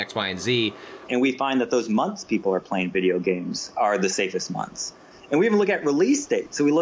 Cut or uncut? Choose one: cut